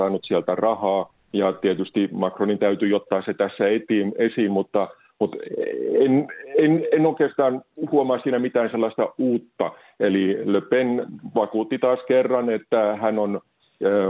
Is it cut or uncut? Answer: uncut